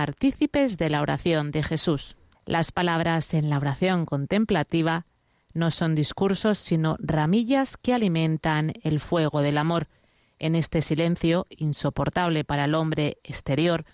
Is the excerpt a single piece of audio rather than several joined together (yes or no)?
no